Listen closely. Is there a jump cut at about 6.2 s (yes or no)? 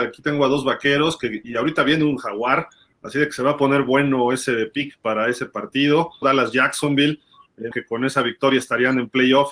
yes